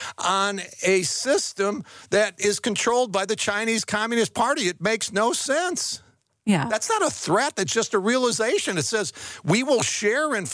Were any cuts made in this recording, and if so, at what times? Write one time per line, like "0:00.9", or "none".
none